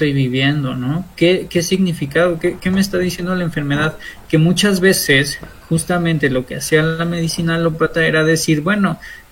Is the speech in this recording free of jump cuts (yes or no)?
yes